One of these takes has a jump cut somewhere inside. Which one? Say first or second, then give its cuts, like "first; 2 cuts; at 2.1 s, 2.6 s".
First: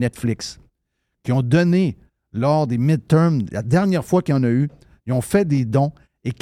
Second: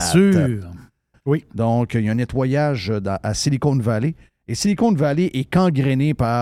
second; 1 cut; at 1.1 s